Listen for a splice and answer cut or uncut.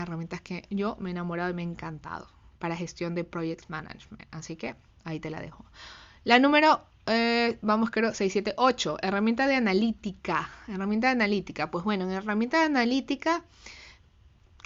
uncut